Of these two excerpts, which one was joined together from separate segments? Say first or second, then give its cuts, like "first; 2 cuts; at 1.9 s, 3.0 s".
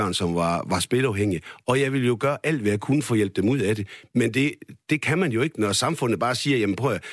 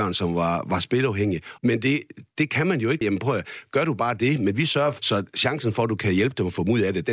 second; 3 cuts; at 1.6 s, 3.0 s, 5.0 s